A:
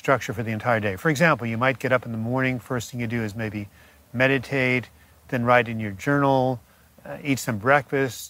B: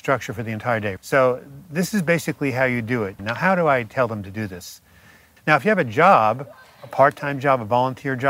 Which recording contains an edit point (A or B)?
B